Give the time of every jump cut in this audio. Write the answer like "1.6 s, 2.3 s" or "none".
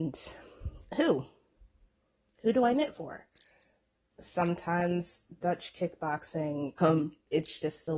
4.1 s, 6.8 s